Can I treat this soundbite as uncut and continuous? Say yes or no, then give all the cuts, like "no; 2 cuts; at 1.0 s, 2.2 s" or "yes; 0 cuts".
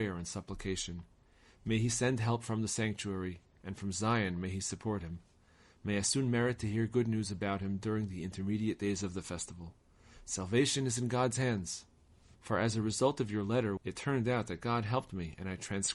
no; 2 cuts; at 12.3 s, 13.8 s